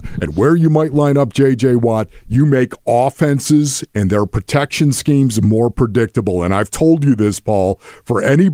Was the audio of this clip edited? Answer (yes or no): no